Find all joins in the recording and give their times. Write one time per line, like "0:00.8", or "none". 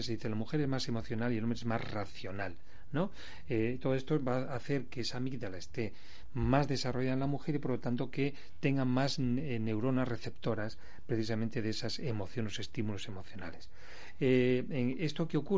none